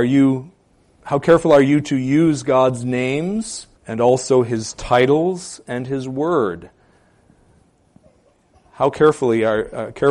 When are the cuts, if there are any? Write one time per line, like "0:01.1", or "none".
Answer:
0:03.8